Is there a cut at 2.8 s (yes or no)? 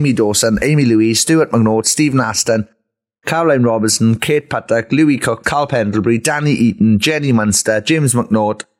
no